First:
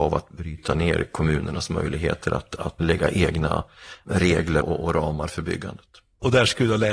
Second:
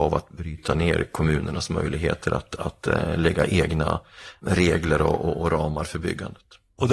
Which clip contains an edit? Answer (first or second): first